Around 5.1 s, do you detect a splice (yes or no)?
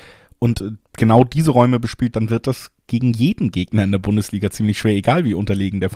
no